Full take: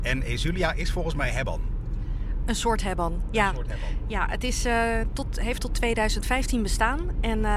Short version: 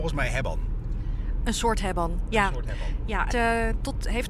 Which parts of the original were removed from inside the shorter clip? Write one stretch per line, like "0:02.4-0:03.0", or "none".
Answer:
0:04.3-0:04.6